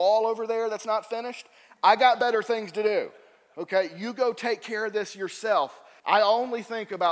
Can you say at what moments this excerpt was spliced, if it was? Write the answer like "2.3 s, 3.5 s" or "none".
6.0 s